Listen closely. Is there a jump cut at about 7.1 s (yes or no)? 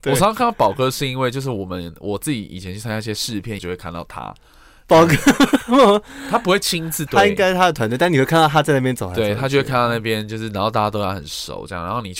yes